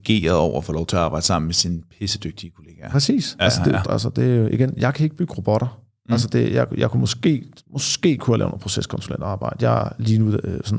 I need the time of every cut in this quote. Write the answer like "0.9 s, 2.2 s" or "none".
3.8 s